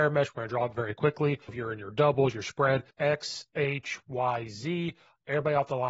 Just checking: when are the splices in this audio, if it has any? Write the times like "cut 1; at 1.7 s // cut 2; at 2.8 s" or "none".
cut 1; at 1.5 s // cut 2; at 2.9 s